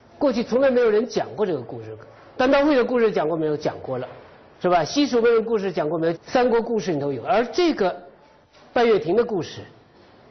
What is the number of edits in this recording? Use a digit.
1